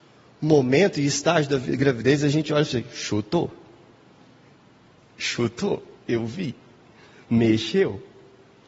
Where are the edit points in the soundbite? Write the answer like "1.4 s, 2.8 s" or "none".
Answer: none